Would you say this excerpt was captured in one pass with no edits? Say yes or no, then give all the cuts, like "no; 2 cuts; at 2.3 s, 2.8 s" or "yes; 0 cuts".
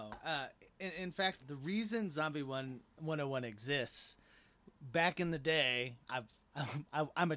no; 2 cuts; at 1.4 s, 6.0 s